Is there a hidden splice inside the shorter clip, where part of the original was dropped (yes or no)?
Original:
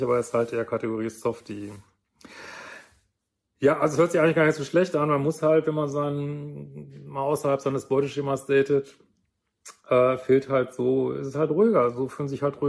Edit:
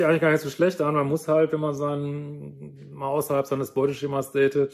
no